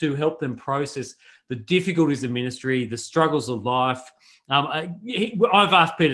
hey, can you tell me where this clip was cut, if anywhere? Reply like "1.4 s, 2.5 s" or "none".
none